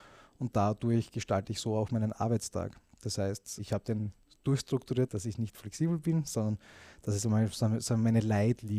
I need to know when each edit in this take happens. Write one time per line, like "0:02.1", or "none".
0:05.1